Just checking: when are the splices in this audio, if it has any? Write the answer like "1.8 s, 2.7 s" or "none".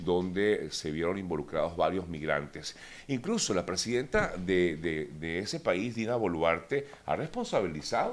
none